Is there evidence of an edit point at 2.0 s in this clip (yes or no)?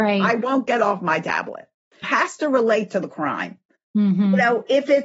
yes